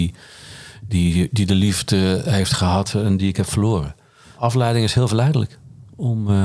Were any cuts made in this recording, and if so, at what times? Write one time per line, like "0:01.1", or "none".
none